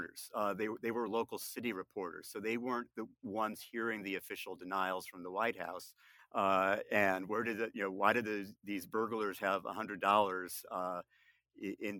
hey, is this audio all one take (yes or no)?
no